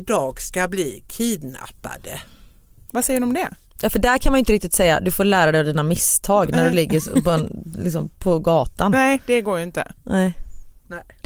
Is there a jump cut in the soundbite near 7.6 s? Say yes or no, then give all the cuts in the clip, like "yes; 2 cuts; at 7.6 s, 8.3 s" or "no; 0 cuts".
no; 1 cut; at 2.9 s